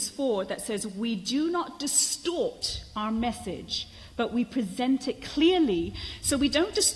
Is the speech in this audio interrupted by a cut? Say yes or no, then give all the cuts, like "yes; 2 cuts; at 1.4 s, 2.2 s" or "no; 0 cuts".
no; 0 cuts